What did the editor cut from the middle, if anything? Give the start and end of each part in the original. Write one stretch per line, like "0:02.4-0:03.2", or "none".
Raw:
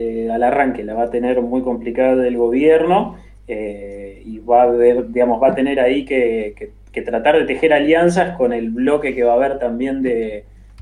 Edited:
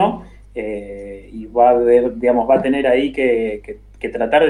none